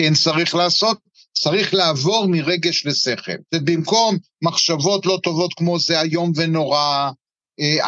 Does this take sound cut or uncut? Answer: cut